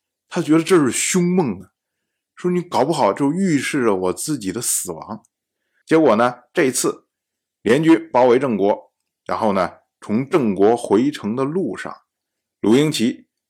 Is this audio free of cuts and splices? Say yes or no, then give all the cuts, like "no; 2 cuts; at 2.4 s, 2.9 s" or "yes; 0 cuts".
no; 1 cut; at 5.8 s